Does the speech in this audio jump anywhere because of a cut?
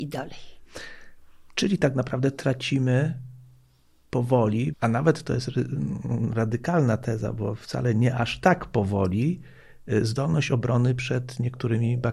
yes; 1 cut; at 4.7 s

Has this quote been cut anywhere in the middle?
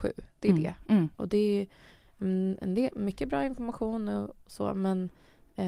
yes; 1 cut; at 1.1 s

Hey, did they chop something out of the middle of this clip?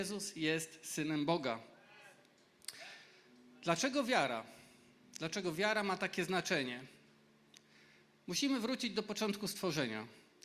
no; 0 cuts

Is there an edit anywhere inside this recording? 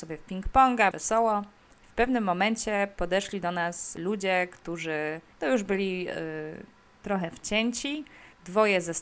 yes; 1 cut; at 0.9 s

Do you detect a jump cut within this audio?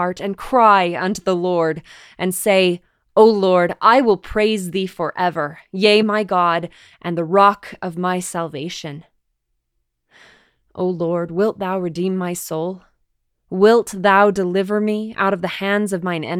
yes; 1 cut; at 6.0 s

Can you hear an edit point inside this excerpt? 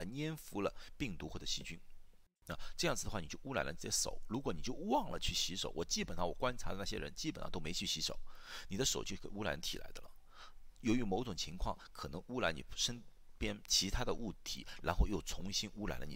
no; 0 cuts

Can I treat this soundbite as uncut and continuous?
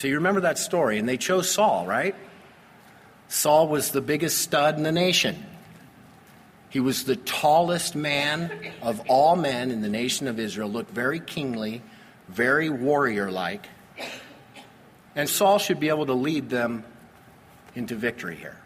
no; 1 cut; at 15.3 s

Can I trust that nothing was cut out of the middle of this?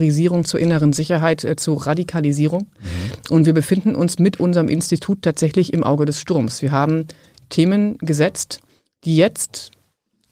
yes; 0 cuts

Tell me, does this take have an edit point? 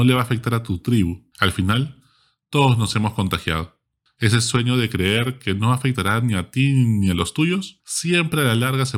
yes; 1 cut; at 1.3 s

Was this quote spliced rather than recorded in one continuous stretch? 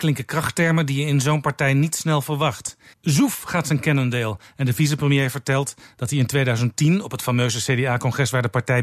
yes; 1 cut; at 2.9 s

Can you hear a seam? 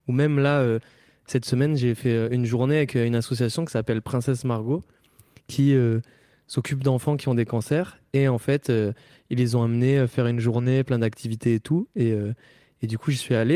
no; 0 cuts

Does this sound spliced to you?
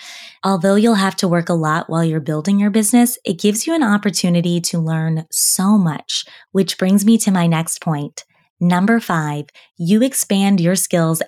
no; 0 cuts

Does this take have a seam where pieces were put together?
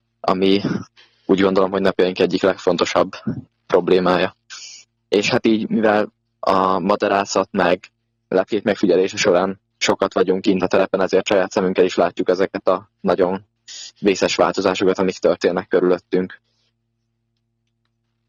no; 0 cuts

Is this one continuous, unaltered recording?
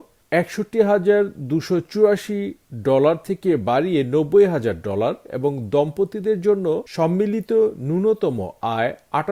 no; 1 cut; at 6.9 s

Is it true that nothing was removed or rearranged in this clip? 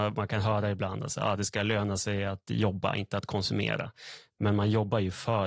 yes; 0 cuts

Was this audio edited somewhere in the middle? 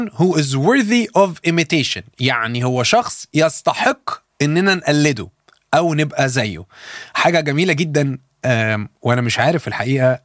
no; 0 cuts

